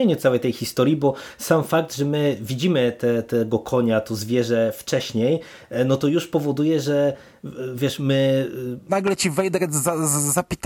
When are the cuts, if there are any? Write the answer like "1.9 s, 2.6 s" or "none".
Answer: 8.9 s